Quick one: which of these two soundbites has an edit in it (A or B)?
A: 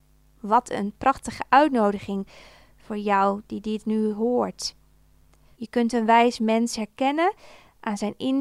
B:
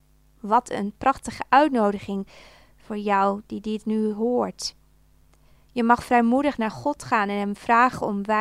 A